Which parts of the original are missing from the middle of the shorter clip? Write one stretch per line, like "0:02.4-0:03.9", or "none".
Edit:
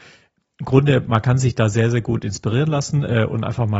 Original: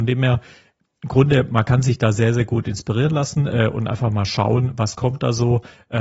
none